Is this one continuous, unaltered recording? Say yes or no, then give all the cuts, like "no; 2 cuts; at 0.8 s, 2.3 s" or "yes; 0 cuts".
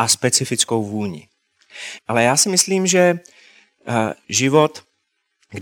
no; 1 cut; at 2.0 s